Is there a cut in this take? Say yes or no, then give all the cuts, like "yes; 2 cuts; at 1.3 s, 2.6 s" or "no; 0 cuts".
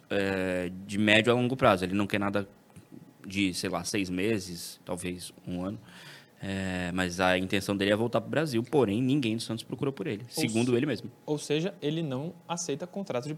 no; 0 cuts